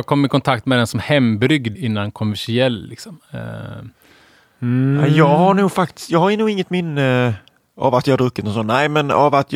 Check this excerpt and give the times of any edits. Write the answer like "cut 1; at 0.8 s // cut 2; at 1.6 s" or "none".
cut 1; at 1.8 s